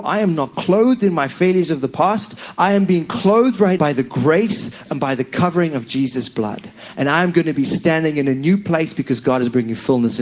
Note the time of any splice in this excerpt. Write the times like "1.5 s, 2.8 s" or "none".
3.8 s, 4.9 s